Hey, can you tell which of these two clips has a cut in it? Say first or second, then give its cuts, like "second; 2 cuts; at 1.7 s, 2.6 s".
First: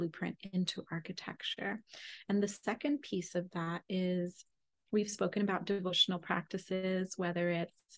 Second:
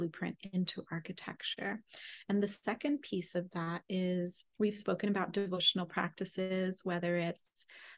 second; 1 cut; at 4.5 s